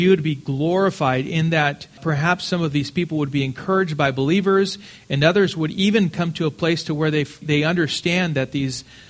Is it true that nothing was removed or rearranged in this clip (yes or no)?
no